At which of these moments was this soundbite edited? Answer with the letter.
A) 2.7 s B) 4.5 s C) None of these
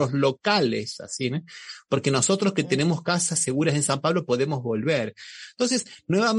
C